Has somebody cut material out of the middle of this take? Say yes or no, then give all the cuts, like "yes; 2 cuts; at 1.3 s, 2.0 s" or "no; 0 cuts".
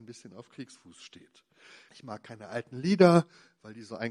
yes; 1 cut; at 1.9 s